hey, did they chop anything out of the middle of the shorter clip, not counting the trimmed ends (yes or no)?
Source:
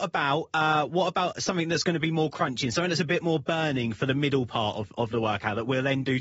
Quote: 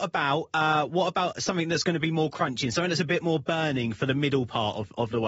no